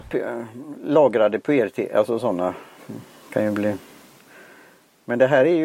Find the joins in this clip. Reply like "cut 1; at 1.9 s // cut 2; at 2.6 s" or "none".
none